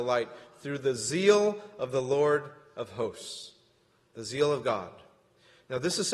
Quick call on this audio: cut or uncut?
uncut